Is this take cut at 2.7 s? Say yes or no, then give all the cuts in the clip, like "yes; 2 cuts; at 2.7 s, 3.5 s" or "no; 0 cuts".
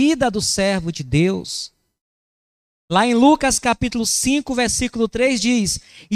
yes; 1 cut; at 2.7 s